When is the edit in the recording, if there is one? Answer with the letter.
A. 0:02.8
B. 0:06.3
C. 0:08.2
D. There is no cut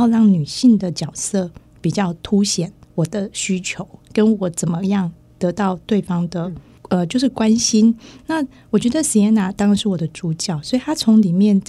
A